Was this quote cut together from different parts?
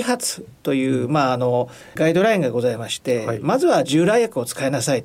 no; 0 cuts

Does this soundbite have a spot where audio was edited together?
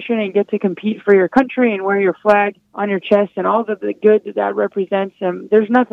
yes; 1 cut; at 2.6 s

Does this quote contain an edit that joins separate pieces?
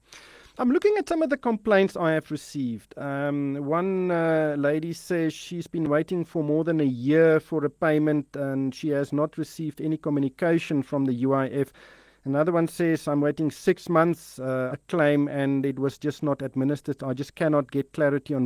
yes; 1 cut; at 14.7 s

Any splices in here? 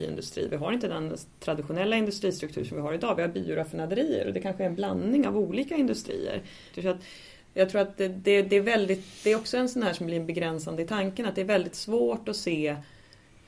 yes; 1 cut; at 6.7 s

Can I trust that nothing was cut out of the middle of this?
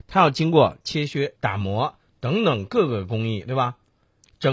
no; 1 cut; at 1.4 s

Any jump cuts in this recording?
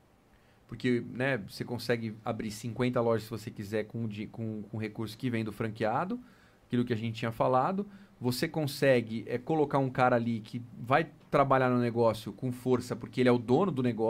no; 0 cuts

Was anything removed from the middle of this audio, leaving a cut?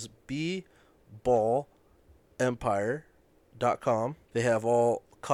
yes; 1 cut; at 4.2 s

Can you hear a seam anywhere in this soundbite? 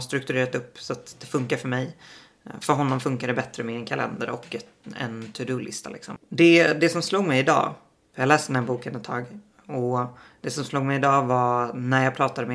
yes; 2 cuts; at 6.2 s, 8.0 s

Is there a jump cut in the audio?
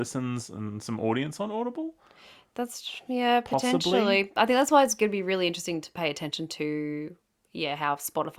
no; 0 cuts

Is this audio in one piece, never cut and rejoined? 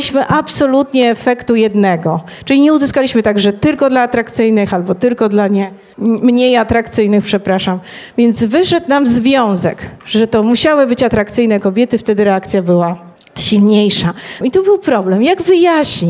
no; 1 cut; at 14.4 s

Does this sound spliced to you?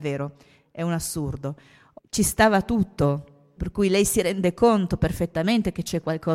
yes; 2 cuts; at 2.0 s, 3.6 s

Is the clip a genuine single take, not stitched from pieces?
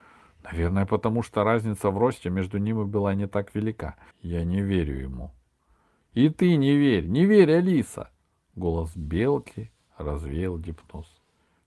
no; 1 cut; at 4.1 s

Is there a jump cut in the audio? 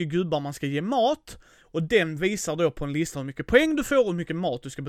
no; 0 cuts

